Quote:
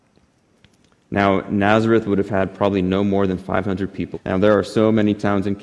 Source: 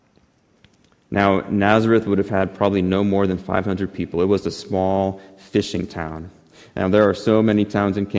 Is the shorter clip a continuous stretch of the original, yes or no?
no